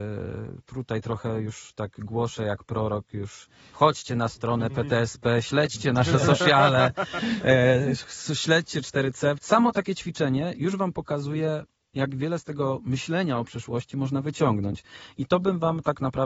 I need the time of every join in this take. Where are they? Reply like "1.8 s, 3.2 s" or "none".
9.4 s

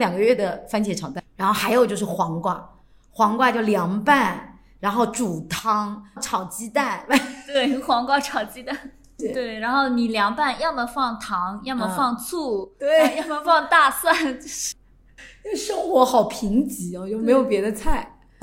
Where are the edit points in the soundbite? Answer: none

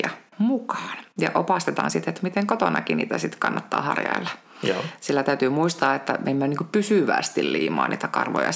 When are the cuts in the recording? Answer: none

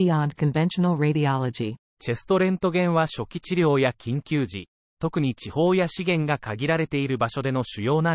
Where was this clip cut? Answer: 1.9 s

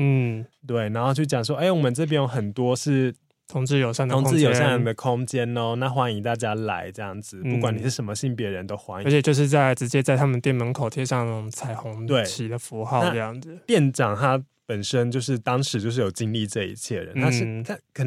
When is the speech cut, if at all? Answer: none

